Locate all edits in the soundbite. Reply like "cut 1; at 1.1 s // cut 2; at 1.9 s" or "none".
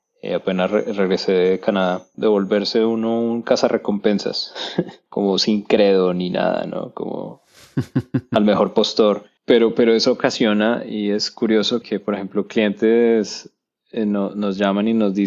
cut 1; at 2.1 s // cut 2; at 9.4 s // cut 3; at 11.8 s